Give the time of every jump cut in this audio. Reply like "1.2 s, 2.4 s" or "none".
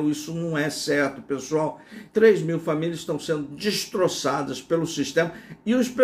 2.1 s